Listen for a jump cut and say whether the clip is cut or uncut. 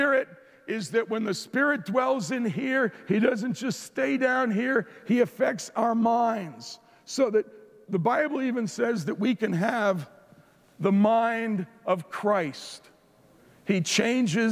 uncut